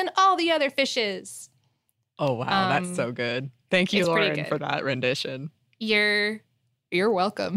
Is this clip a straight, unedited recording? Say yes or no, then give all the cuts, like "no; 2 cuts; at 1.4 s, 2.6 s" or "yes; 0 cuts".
yes; 0 cuts